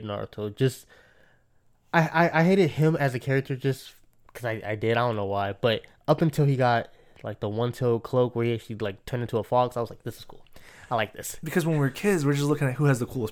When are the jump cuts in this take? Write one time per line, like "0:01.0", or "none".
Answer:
none